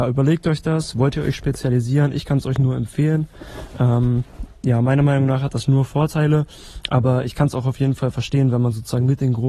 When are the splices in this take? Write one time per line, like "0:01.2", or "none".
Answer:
none